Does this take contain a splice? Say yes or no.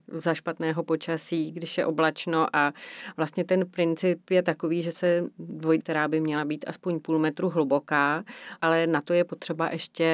yes